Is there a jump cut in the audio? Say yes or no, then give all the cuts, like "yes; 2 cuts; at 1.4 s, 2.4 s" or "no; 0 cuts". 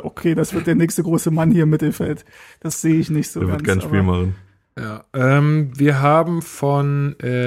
no; 0 cuts